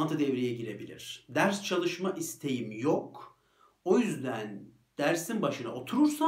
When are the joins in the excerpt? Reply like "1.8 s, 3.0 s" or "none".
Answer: none